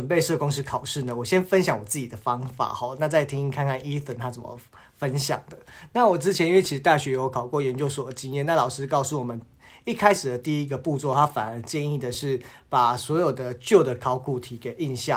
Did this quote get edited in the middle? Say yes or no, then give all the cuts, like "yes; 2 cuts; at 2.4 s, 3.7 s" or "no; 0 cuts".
no; 0 cuts